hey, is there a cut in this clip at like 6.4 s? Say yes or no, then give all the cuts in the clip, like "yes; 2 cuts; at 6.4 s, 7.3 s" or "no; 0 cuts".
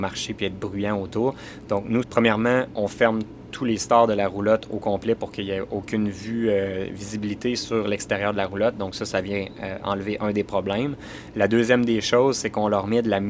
no; 1 cut; at 2.0 s